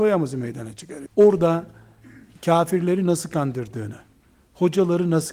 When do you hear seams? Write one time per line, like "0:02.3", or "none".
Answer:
0:01.1